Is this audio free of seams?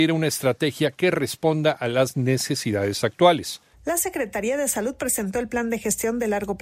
no; 1 cut; at 3.7 s

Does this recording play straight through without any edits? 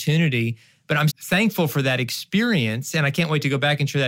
no; 1 cut; at 1.1 s

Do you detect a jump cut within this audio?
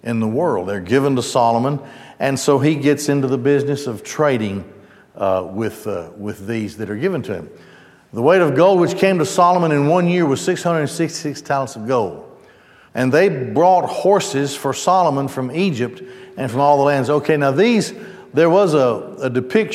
yes; 1 cut; at 12.9 s

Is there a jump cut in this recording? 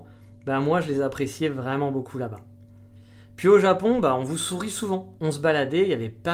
yes; 1 cut; at 5.2 s

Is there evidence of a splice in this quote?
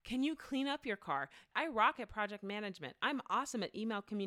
yes; 1 cut; at 1.5 s

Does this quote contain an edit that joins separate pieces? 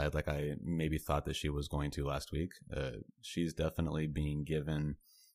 no; 0 cuts

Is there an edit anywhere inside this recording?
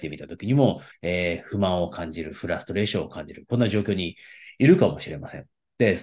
yes; 1 cut; at 0.9 s

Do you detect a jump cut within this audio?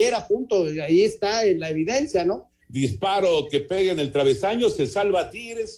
yes; 1 cut; at 2.6 s

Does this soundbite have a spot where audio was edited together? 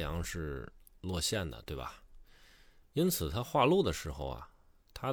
no; 0 cuts

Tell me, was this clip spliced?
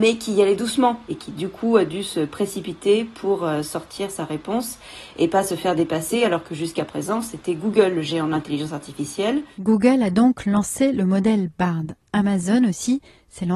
no; 0 cuts

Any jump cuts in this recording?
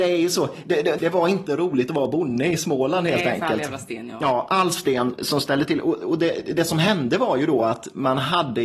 yes; 2 cuts; at 1.0 s, 5.2 s

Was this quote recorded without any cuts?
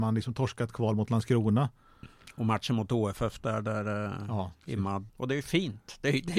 no; 1 cut; at 5.1 s

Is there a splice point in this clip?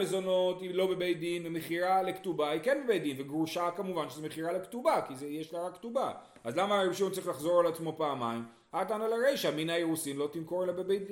no; 0 cuts

